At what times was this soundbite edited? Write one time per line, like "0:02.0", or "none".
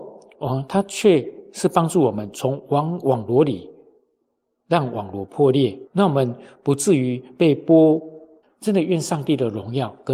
0:05.9
0:08.4